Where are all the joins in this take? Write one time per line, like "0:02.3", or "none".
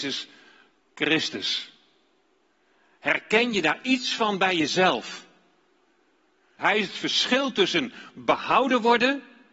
0:06.6